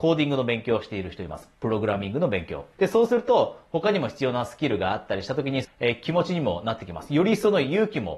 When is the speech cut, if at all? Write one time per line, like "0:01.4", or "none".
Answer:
0:02.7
0:05.6